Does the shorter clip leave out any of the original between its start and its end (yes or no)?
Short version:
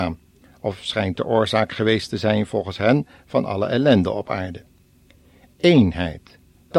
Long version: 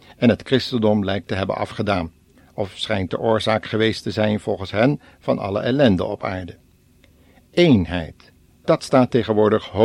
no